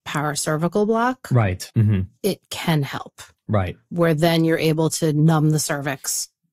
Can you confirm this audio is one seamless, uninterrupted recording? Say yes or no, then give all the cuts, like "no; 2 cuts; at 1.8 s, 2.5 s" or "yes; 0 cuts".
no; 1 cut; at 1.7 s